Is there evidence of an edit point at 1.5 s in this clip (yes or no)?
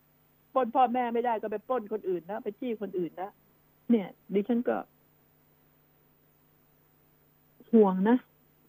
no